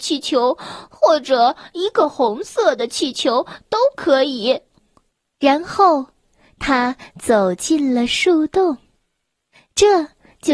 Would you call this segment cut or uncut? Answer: uncut